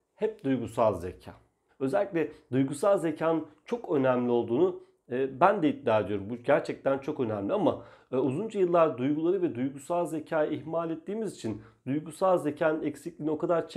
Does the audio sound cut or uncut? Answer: cut